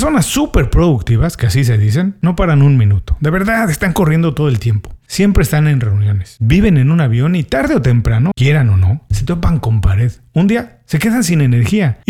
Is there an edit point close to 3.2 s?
no; 2 cuts; at 6.4 s, 8.3 s

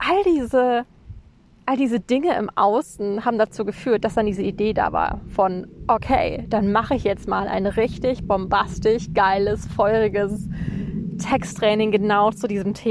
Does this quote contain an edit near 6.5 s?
no; 0 cuts

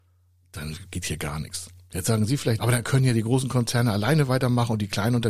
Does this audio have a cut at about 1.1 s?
no; 1 cut; at 2.6 s

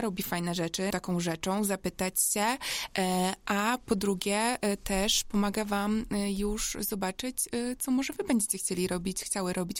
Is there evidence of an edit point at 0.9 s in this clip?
yes; 1 cut; at 0.9 s

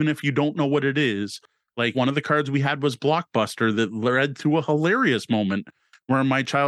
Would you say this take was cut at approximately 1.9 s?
yes; 1 cut; at 1.9 s

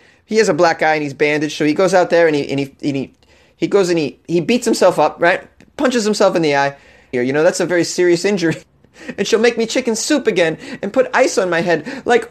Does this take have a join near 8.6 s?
yes; 2 cuts; at 7.1 s, 8.6 s

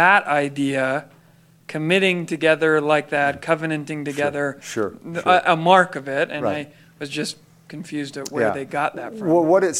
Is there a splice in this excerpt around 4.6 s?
yes; 1 cut; at 4.6 s

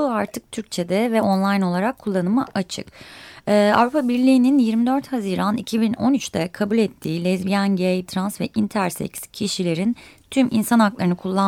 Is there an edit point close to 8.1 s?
yes; 1 cut; at 8.1 s

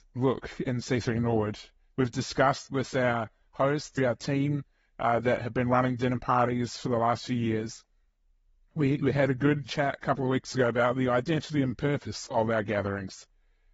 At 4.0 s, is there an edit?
yes; 1 cut; at 4.0 s

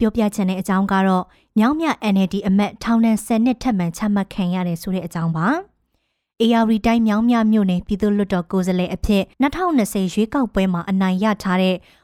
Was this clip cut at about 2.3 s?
no; 1 cut; at 9.3 s

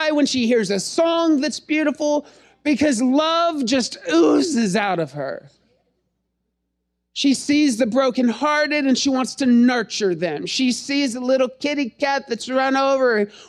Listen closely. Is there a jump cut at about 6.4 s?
no; 0 cuts

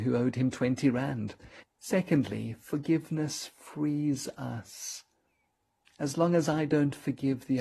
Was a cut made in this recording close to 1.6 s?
yes; 1 cut; at 1.6 s

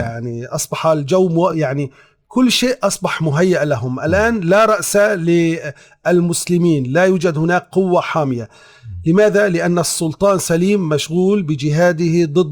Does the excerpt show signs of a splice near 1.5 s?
yes; 1 cut; at 1.5 s

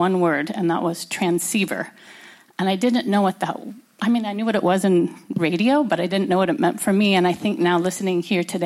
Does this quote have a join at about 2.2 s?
no; 0 cuts

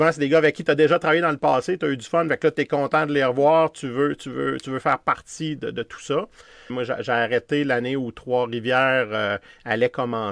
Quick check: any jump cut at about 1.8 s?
no; 1 cut; at 6.7 s

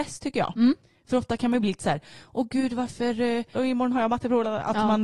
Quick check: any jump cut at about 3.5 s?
yes; 1 cut; at 3.5 s

